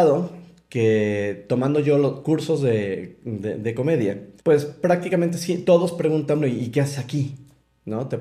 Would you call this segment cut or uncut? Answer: cut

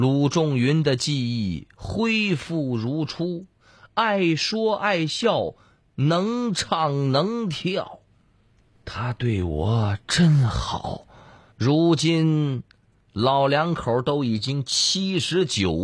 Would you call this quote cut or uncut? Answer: cut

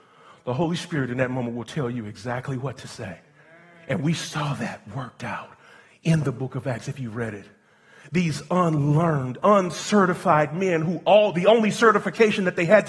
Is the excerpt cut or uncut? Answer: uncut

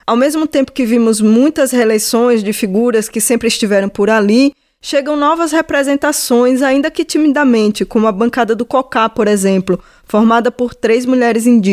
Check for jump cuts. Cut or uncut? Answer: uncut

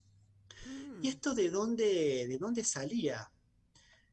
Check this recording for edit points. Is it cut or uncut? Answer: uncut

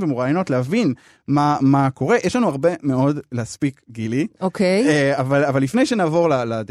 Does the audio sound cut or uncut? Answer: uncut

